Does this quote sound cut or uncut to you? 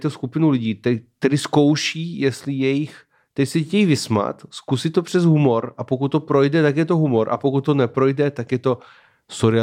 uncut